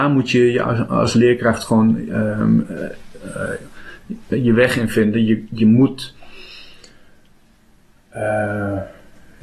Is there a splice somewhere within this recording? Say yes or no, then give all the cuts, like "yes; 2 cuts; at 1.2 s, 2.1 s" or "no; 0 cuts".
no; 0 cuts